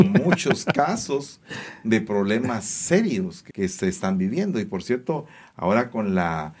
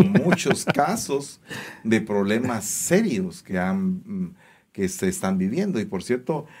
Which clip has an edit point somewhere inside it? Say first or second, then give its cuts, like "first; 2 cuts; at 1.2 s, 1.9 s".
first; 1 cut; at 3.5 s